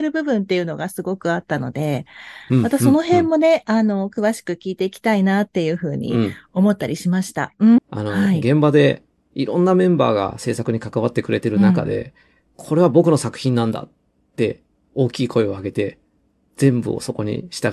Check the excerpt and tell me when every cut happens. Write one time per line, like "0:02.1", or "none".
0:07.8